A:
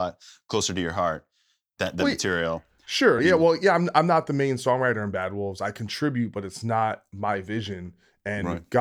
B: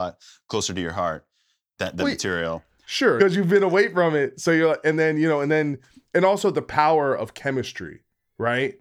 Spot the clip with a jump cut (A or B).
B